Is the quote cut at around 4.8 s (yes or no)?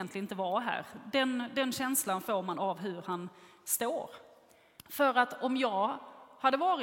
yes